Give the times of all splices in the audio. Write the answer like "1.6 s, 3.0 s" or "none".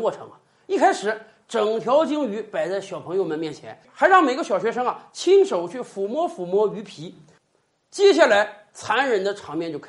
none